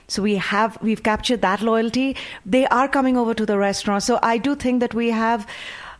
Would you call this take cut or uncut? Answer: cut